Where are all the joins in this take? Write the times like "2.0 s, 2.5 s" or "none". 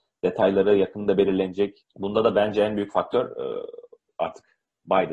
1.8 s

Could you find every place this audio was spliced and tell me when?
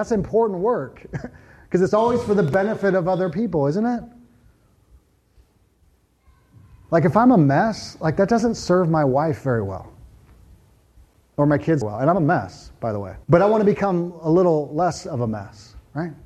11.8 s, 13.2 s

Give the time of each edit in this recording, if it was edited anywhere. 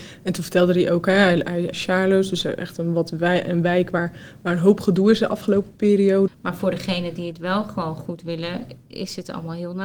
1.7 s, 6.3 s

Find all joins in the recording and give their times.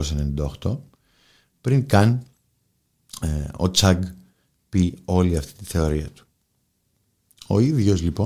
none

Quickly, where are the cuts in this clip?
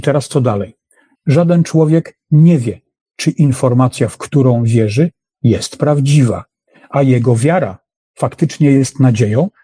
1.2 s

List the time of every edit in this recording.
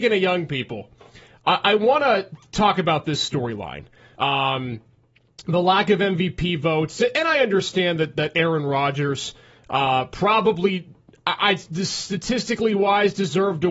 4.1 s

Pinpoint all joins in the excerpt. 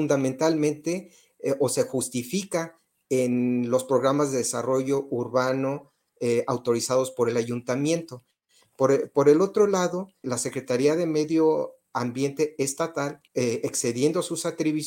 8.6 s, 10.2 s, 13.3 s

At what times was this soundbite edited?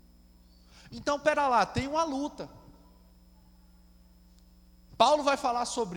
4.9 s

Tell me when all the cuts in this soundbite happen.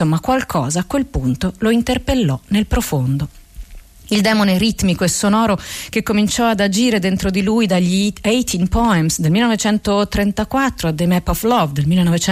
none

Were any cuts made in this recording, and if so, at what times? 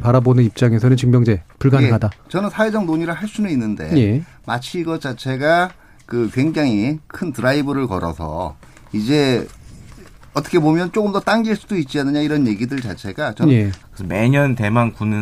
1.5 s, 13.8 s

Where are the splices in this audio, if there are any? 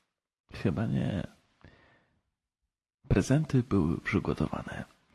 none

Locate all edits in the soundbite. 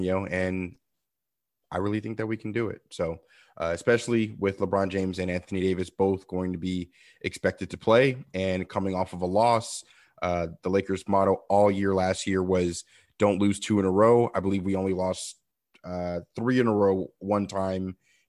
none

